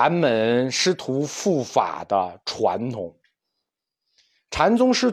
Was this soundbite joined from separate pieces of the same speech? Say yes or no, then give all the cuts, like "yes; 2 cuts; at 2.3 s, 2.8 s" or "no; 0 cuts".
no; 0 cuts